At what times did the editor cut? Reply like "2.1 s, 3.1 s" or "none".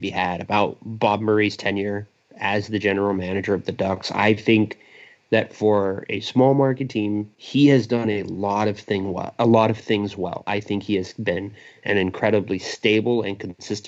7.3 s